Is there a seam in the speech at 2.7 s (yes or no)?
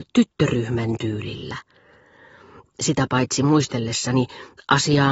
yes